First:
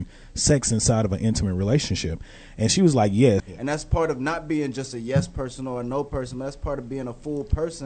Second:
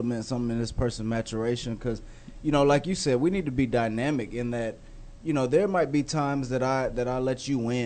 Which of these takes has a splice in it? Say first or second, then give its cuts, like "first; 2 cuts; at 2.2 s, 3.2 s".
first; 1 cut; at 3.4 s